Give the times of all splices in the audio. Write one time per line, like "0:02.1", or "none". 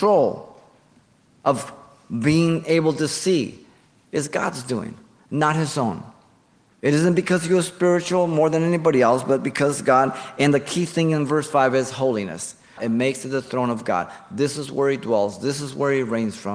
0:12.8

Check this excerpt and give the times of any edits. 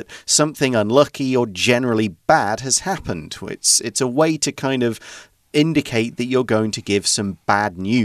none

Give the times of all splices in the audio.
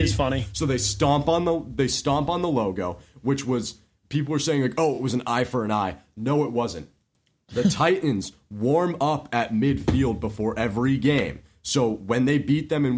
none

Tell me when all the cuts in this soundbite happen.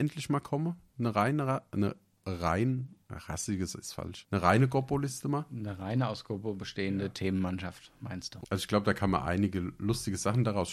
0:08.4

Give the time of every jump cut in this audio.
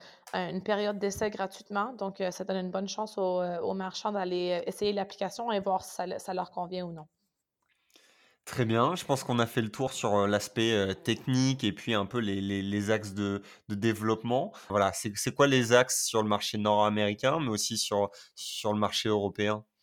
0:14.7

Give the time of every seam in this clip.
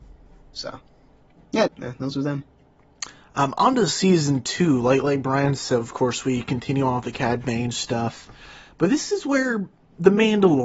0:01.7

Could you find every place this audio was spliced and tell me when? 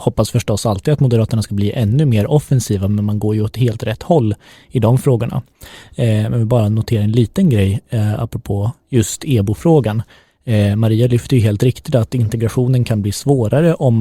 none

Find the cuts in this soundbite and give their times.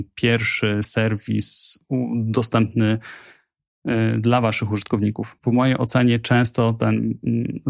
none

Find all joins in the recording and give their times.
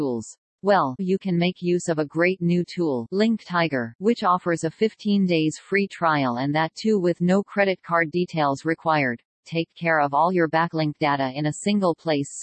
0:01.0
0:09.4

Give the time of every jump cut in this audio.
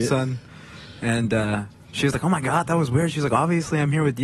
none

